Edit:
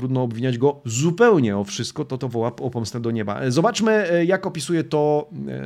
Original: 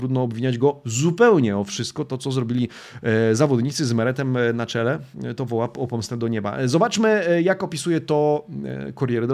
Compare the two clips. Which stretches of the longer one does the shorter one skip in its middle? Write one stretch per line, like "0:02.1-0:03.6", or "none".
0:02.2-0:05.4